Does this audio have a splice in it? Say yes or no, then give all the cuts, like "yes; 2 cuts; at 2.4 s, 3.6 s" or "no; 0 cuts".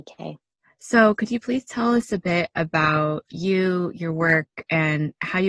no; 0 cuts